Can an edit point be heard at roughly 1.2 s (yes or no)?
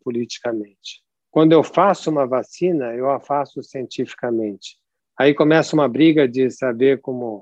no